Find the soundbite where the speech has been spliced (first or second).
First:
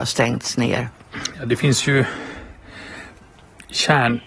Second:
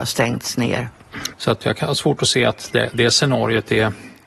second